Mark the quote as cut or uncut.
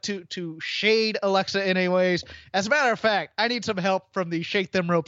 uncut